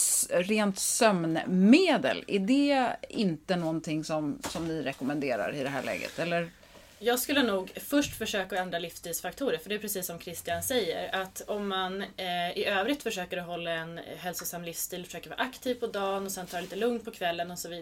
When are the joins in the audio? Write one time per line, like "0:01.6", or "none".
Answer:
none